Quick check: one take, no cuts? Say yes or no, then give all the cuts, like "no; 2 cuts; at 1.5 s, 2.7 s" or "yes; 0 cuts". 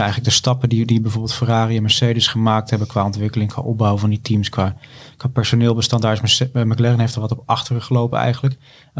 yes; 0 cuts